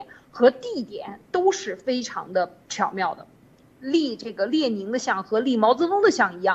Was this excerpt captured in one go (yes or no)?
no